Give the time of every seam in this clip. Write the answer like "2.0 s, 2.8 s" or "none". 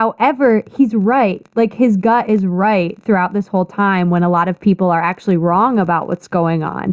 none